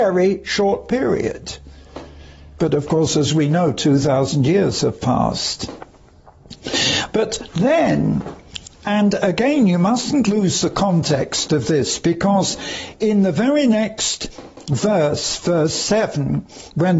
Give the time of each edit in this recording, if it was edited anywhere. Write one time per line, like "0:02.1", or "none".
none

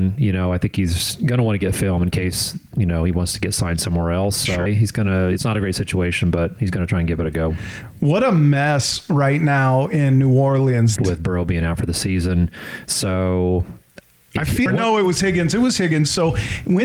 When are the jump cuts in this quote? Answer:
0:04.7
0:11.0
0:14.7

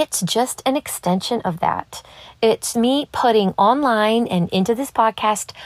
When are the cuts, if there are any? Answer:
0:02.7

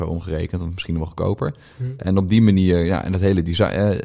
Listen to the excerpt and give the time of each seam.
0:02.0

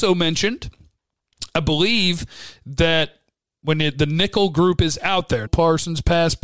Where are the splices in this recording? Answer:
0:05.5

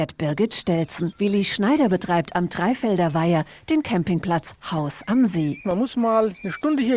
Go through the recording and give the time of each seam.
0:01.1

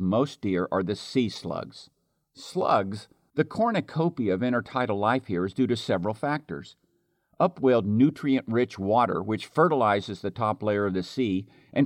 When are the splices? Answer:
0:03.3

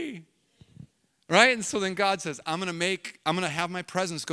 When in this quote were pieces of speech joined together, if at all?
none

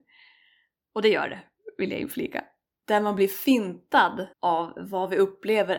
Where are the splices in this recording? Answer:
0:02.8
0:04.3

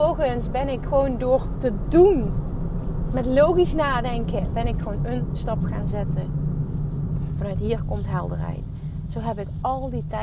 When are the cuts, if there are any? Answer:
0:07.3

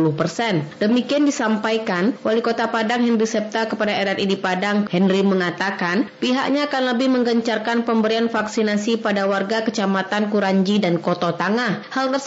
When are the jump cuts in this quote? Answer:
0:04.9

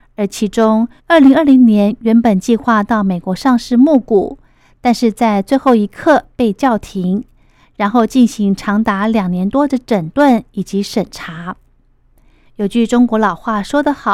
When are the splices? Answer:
0:01.0
0:12.5

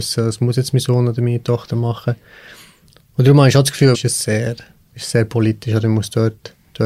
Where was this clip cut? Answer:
0:03.9

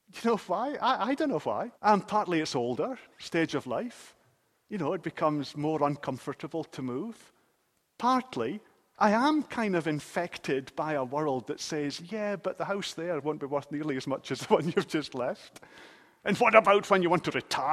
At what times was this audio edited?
0:01.7

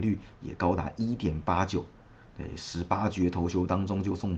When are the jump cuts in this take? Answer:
none

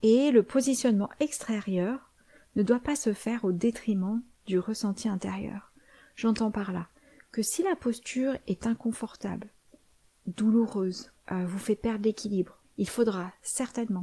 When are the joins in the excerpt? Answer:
0:11.2
0:12.6

